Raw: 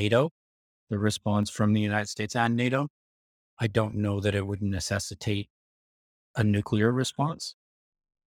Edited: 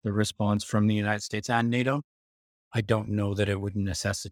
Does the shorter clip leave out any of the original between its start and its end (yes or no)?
no